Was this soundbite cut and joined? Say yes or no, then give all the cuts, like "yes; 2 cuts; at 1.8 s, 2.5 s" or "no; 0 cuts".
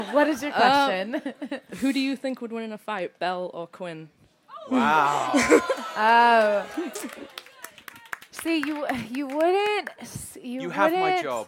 no; 0 cuts